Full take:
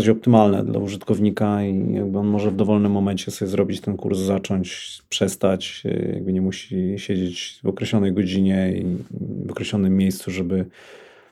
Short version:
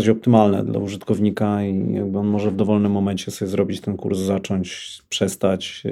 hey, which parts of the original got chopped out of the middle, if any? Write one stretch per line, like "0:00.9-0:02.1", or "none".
none